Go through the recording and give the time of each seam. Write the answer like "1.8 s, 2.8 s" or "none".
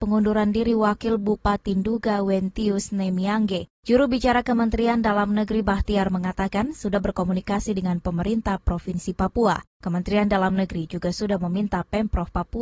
none